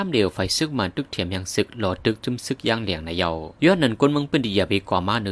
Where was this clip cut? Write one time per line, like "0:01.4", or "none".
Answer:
0:03.5